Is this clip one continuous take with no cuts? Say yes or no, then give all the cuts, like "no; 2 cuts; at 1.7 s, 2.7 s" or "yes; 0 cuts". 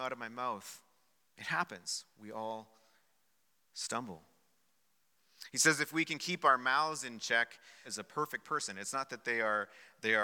no; 1 cut; at 7.8 s